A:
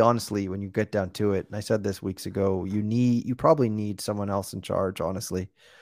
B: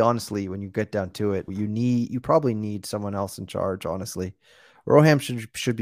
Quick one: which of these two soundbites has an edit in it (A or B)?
B